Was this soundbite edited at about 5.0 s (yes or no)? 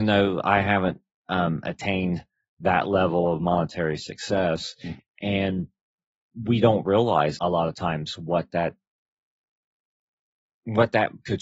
yes